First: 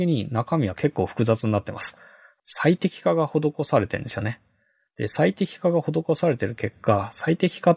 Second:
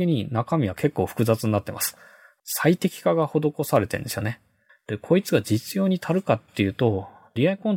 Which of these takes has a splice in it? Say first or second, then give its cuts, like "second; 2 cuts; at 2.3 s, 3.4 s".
second; 1 cut; at 4.7 s